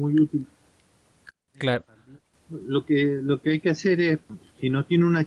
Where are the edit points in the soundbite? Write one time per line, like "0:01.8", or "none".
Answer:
0:02.3